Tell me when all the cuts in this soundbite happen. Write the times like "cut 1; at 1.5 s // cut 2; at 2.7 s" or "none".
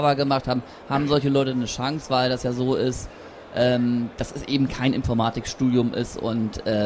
none